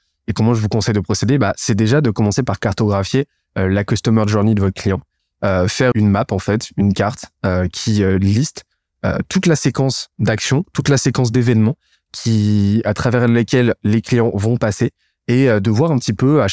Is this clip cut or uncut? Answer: cut